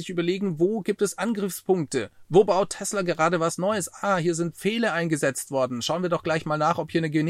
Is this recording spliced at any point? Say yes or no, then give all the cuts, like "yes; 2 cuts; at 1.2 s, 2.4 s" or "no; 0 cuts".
no; 0 cuts